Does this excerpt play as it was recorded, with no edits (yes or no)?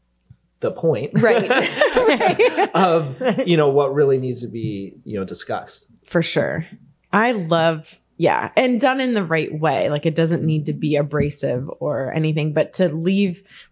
yes